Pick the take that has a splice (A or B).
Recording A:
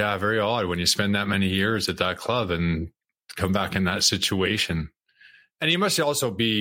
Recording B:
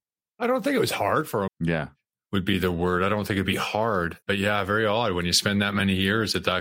B